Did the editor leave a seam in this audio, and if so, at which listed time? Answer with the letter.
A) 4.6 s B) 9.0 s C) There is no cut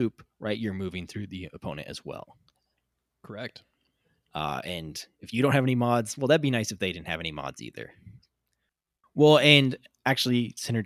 B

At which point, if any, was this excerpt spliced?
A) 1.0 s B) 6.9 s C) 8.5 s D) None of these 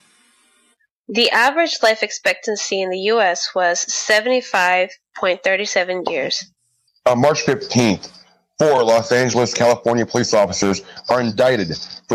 B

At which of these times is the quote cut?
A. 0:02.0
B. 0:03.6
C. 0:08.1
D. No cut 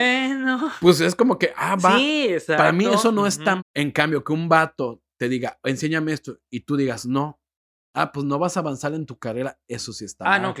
B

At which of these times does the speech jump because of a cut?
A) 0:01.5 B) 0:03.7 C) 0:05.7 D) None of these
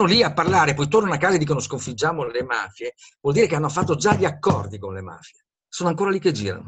C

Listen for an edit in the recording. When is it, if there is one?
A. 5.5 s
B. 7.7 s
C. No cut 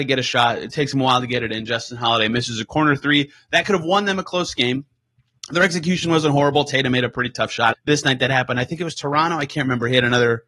B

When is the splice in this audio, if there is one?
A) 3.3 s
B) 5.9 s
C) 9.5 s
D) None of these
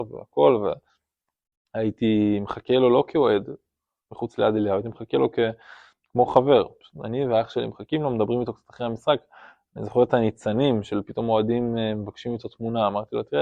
D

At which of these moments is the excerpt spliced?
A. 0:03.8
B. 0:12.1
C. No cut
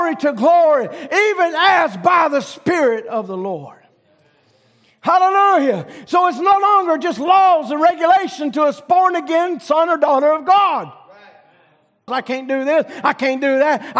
B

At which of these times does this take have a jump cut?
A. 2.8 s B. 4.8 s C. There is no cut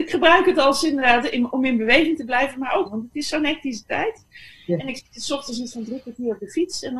A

